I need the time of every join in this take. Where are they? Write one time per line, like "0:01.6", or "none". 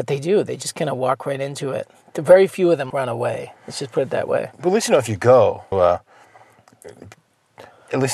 0:02.9
0:05.7